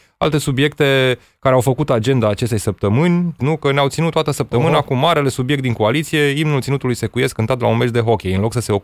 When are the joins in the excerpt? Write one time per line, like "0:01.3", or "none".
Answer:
0:03.4